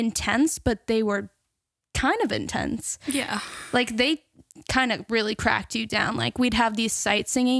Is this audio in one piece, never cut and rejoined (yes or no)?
yes